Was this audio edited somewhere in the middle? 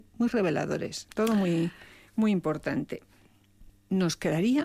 yes; 1 cut; at 1.1 s

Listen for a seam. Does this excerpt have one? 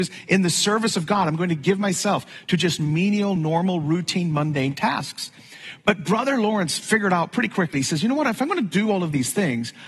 no; 0 cuts

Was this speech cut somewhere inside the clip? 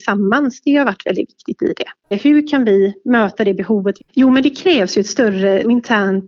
yes; 1 cut; at 4.0 s

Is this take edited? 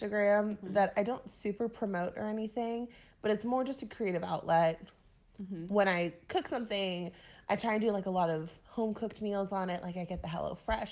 no; 0 cuts

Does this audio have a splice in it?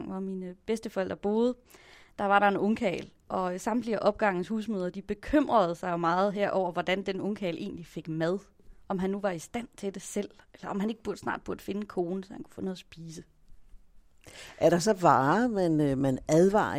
no; 0 cuts

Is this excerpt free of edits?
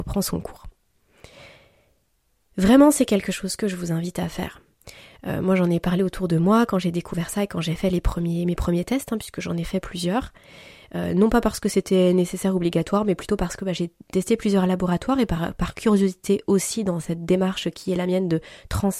yes; 0 cuts

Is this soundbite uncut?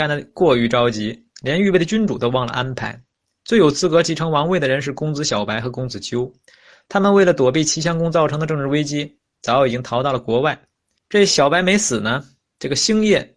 no; 1 cut; at 11.0 s

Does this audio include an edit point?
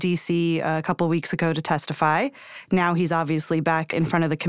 no; 0 cuts

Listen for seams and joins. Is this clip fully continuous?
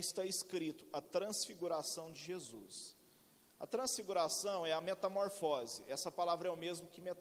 yes; 0 cuts

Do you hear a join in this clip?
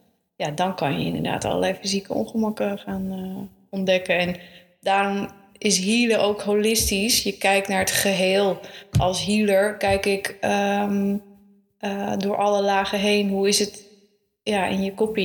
no; 0 cuts

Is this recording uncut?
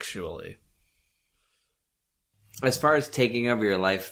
yes; 0 cuts

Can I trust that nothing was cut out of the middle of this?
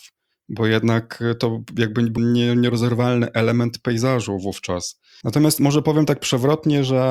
no; 2 cuts; at 2.2 s, 5.2 s

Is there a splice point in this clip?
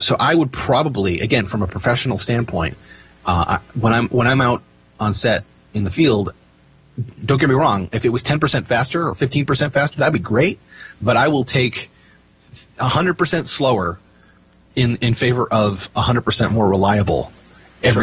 yes; 1 cut; at 15.0 s

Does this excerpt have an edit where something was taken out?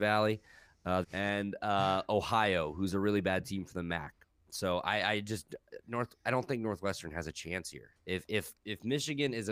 yes; 1 cut; at 1.0 s

